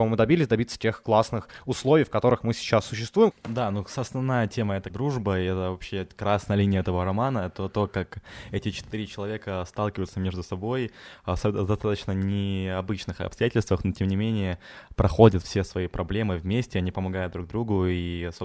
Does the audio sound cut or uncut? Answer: cut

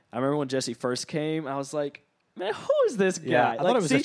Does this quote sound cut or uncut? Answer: uncut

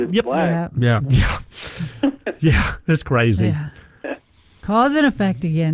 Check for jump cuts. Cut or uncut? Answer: cut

